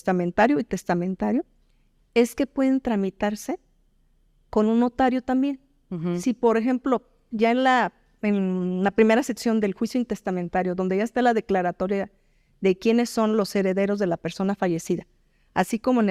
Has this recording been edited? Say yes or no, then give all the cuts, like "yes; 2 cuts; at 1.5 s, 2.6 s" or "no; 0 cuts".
no; 0 cuts